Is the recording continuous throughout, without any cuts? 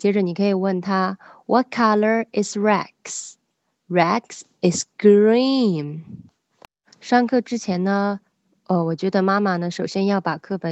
yes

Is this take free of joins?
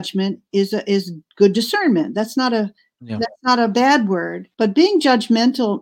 no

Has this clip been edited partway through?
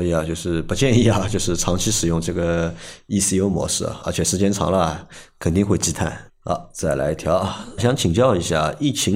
yes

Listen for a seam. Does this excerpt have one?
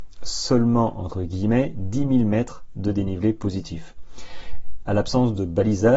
yes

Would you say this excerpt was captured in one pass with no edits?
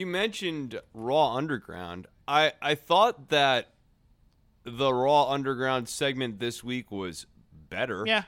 yes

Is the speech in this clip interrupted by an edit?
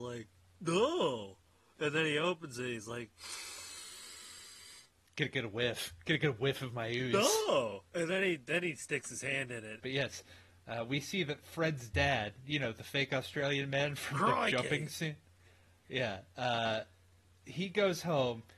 yes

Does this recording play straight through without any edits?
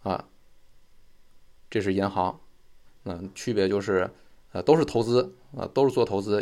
no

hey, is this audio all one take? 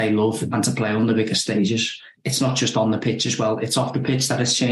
yes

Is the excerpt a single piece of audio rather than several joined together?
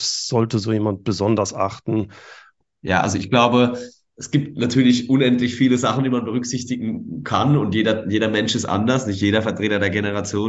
no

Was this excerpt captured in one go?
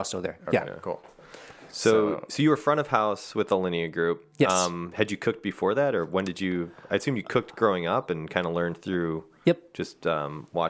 yes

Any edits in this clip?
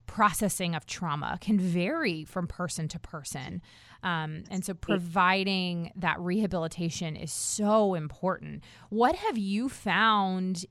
no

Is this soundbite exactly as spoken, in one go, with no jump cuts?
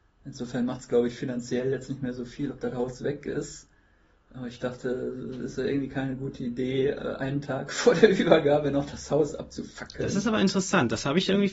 yes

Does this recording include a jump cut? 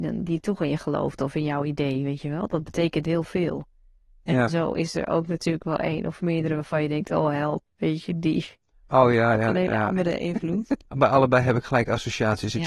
no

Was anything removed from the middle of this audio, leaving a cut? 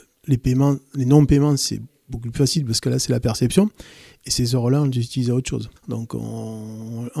yes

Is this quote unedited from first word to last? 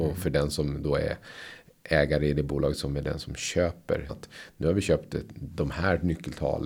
no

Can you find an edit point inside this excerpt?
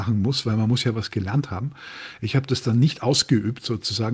no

